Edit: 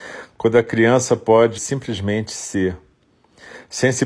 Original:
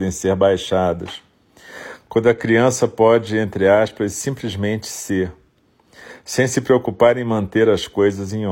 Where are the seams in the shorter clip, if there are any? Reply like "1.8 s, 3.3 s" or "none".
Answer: 1.6 s

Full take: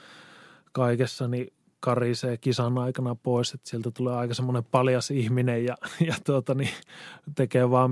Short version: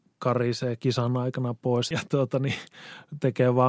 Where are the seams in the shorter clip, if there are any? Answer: 1.9 s

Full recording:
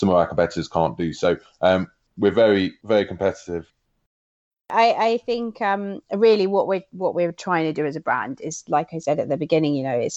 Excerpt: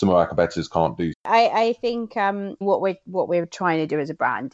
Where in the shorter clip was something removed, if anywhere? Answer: 1.1 s, 2.6 s

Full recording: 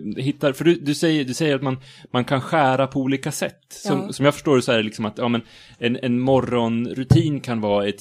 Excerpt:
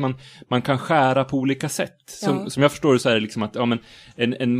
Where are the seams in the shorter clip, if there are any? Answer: none

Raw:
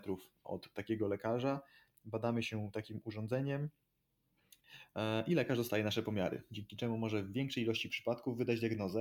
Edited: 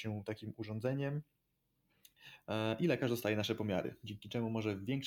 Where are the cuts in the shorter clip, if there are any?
none

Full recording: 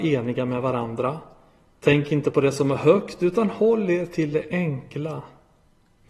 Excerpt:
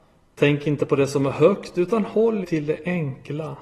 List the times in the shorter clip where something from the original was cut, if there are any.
2.4 s

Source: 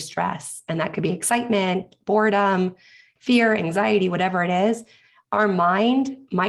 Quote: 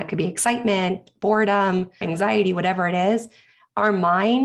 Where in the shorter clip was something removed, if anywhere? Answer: 2.0 s

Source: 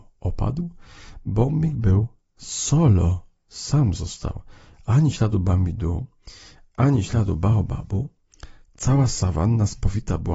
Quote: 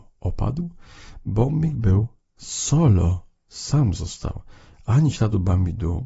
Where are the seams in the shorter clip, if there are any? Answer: none

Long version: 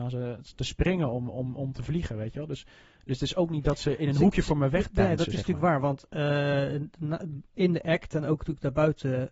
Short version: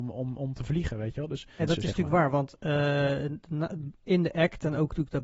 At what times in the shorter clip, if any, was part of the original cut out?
1.6 s

